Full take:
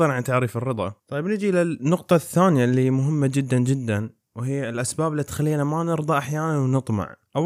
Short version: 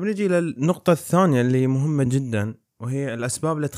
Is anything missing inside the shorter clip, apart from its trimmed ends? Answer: yes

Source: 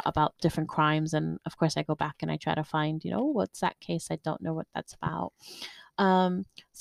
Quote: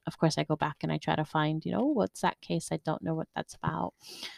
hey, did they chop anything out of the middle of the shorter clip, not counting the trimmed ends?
no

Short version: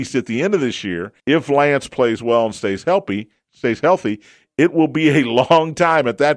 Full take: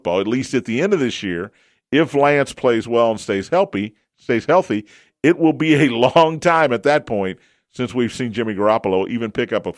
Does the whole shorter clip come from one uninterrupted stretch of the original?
no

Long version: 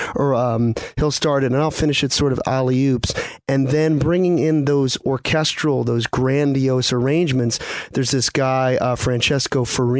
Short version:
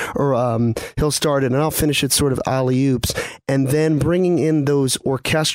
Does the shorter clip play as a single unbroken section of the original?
yes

